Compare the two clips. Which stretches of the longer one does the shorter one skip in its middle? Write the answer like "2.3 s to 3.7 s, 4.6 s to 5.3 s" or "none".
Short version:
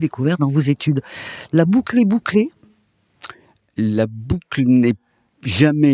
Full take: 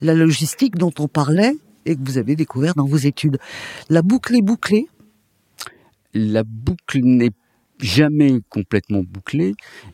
none